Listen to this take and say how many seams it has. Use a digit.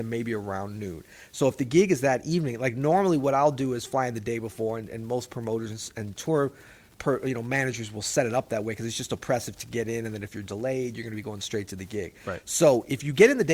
0